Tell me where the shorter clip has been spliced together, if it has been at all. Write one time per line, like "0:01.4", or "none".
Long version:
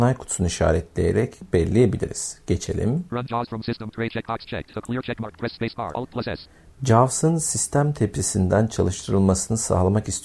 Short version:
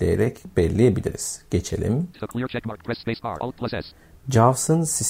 0:02.1